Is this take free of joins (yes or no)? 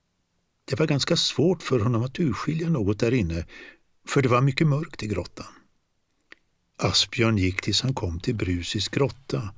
no